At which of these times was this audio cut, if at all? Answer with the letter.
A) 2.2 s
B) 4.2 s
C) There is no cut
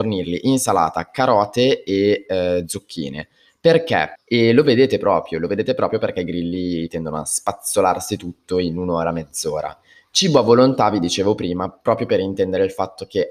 B